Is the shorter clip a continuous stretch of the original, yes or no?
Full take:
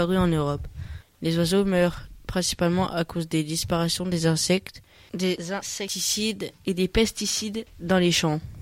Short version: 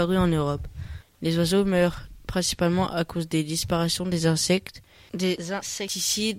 yes